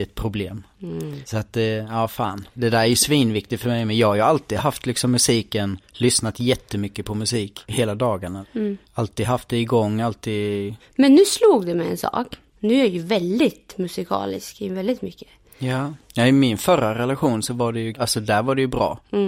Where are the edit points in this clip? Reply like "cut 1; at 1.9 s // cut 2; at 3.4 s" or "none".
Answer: cut 1; at 12.5 s